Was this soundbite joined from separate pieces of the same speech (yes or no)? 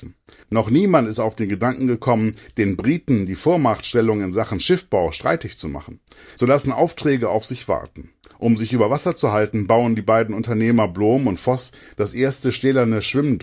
yes